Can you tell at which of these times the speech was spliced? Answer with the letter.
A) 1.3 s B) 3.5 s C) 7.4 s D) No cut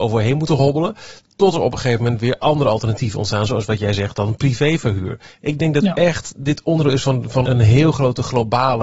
C